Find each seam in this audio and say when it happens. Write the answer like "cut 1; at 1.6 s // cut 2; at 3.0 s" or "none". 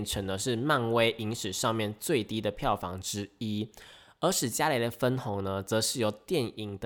none